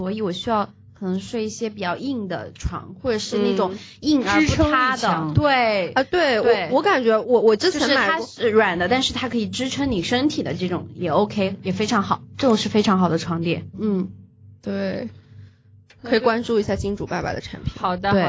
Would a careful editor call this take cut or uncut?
cut